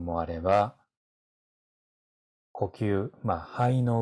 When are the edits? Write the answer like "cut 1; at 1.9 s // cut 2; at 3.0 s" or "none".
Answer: none

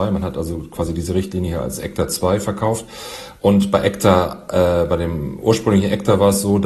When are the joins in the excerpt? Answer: none

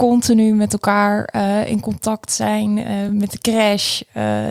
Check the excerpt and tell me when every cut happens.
none

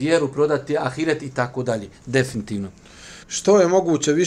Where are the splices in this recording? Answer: cut 1; at 3.2 s

